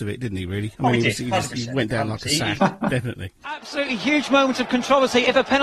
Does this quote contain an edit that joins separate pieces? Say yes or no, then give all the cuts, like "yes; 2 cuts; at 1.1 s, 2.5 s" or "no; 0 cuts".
yes; 1 cut; at 2.6 s